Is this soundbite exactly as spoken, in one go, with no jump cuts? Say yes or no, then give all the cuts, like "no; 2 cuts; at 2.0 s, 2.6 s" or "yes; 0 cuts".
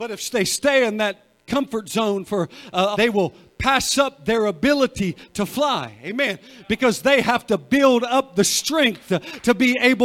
no; 1 cut; at 2.9 s